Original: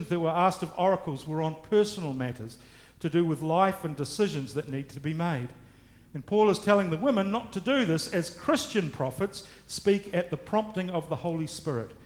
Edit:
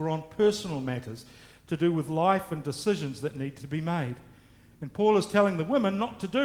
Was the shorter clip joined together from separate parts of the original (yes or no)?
no